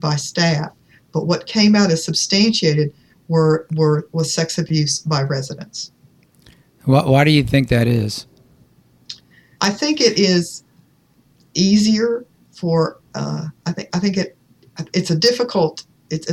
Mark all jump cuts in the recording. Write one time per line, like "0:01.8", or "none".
0:09.6